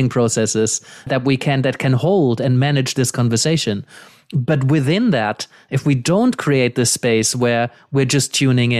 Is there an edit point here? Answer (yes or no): yes